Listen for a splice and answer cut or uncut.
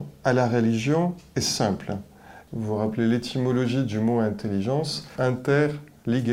cut